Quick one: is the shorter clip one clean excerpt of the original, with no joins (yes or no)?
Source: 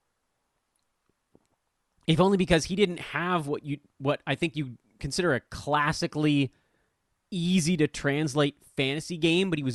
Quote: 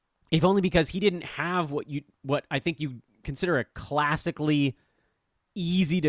yes